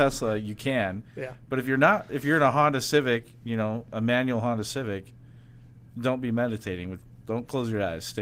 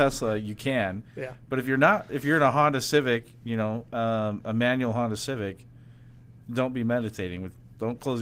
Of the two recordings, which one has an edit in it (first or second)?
first